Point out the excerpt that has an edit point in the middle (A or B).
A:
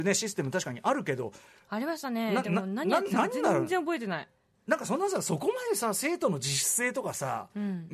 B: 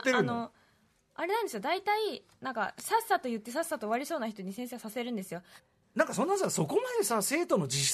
B